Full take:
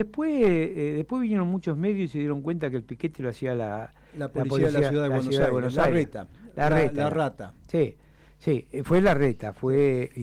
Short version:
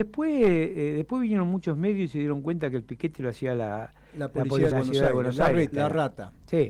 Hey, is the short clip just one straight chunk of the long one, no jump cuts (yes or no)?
no